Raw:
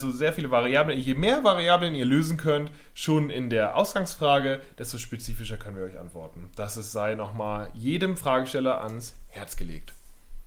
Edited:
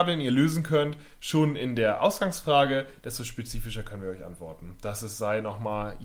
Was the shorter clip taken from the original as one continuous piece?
yes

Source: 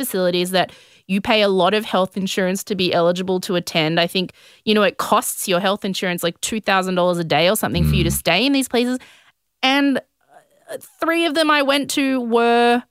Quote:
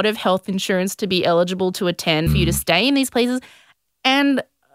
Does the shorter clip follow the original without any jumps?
no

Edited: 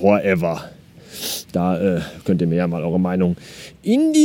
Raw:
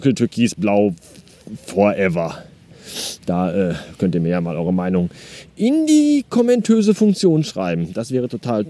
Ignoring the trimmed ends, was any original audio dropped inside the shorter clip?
no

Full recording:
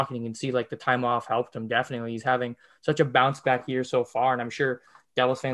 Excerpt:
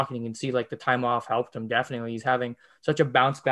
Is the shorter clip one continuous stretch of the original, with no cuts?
yes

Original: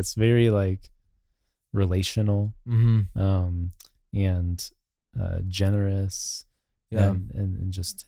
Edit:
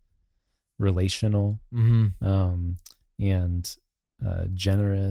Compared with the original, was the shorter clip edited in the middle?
no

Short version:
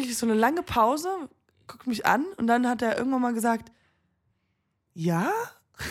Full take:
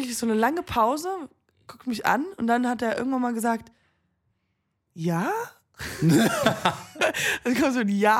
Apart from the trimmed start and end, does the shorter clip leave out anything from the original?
no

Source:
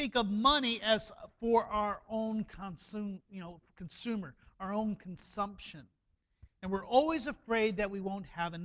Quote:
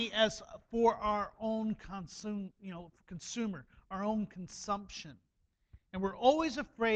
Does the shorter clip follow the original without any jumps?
yes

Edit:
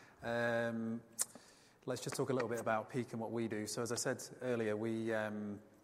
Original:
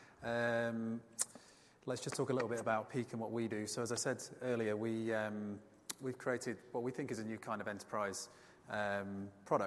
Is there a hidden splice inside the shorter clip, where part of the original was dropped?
no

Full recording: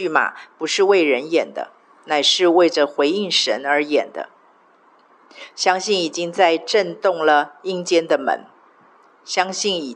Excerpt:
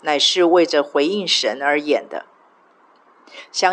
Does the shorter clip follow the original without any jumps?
yes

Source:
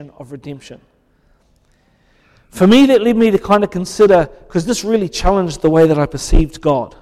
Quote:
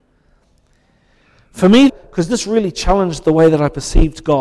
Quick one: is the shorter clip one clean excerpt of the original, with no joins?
no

